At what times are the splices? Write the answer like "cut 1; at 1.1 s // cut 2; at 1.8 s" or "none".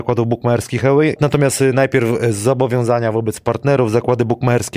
cut 1; at 1.2 s